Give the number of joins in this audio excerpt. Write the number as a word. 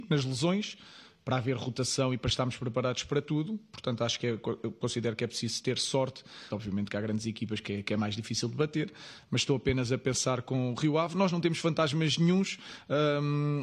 one